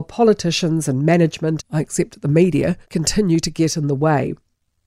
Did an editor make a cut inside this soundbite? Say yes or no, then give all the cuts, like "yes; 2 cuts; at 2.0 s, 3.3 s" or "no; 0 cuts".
yes; 2 cuts; at 1.6 s, 2.8 s